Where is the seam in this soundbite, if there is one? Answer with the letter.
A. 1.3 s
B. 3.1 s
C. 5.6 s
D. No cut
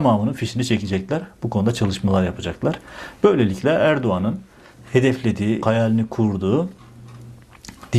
C